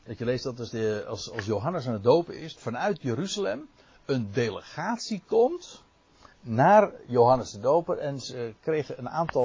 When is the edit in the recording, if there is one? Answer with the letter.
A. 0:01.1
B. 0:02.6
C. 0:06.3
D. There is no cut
B